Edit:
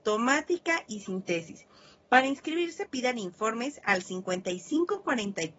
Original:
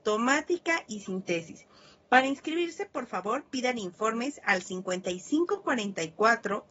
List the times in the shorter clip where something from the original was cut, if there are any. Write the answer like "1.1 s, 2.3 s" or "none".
2.9 s